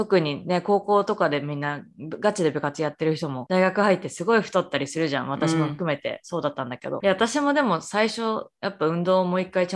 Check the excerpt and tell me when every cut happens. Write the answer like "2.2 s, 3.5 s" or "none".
7.0 s

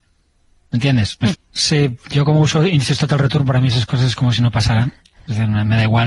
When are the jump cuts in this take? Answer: 1.3 s

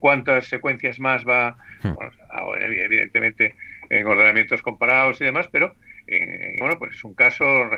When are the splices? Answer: 2.0 s, 6.6 s

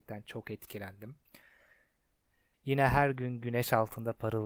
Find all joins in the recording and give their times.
2.5 s

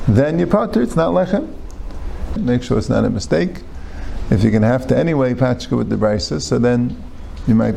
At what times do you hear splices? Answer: 2.4 s

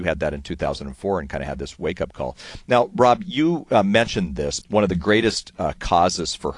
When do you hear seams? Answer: 4.6 s

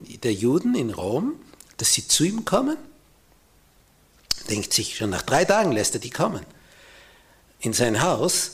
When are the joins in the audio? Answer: none

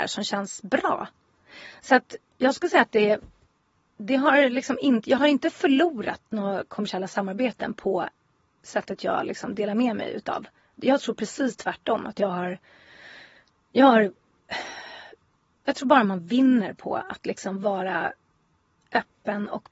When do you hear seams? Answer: 10.7 s

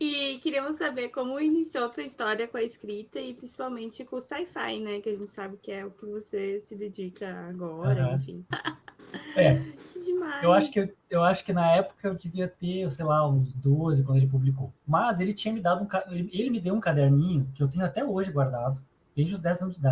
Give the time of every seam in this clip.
8.5 s

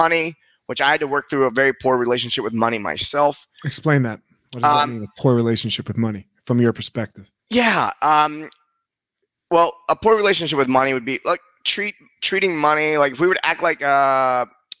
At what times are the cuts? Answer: none

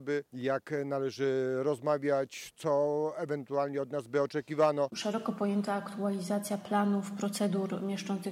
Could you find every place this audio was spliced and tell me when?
4.9 s

